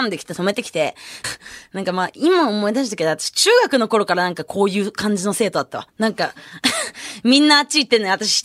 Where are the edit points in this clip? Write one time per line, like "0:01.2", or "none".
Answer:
0:01.2